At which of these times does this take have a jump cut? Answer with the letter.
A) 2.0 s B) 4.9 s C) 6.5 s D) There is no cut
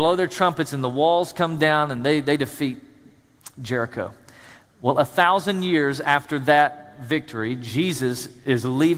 D